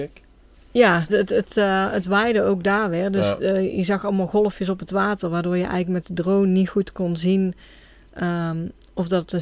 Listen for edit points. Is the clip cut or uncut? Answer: cut